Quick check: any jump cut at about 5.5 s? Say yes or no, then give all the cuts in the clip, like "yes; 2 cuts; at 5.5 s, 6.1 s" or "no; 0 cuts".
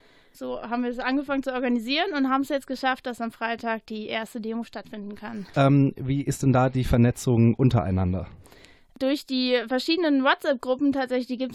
yes; 1 cut; at 5.5 s